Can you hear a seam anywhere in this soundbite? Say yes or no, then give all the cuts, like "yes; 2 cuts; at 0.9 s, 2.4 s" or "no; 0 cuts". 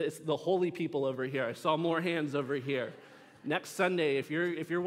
no; 0 cuts